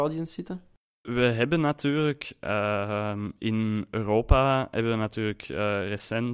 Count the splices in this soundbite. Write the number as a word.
zero